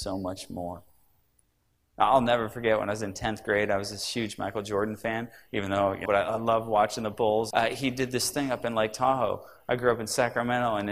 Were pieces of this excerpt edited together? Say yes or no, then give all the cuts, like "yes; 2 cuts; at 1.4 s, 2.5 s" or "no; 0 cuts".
yes; 2 cuts; at 6.0 s, 7.5 s